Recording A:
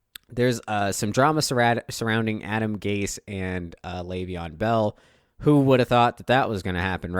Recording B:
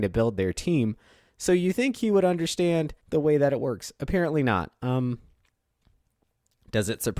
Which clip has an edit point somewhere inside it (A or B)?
B